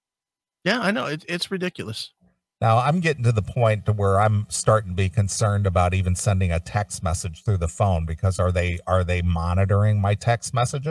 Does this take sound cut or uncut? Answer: uncut